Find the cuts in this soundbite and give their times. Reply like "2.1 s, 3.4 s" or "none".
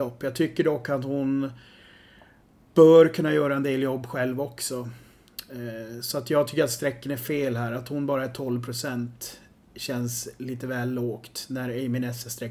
none

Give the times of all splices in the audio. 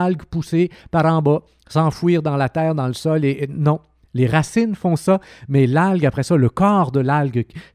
none

